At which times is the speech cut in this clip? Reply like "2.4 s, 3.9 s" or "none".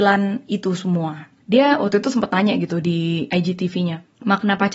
1.4 s

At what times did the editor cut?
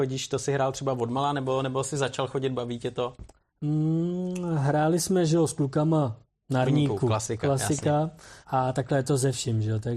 6.6 s, 8.4 s

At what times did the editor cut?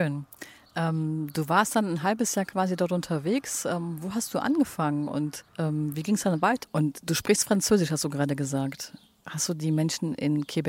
5.5 s, 6.6 s

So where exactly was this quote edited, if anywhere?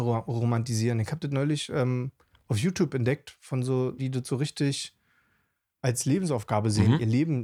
4.0 s

